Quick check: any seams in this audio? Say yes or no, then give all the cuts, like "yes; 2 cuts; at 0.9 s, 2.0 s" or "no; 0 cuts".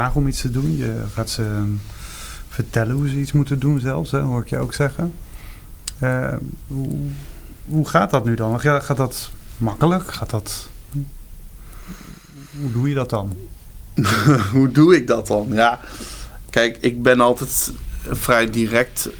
no; 0 cuts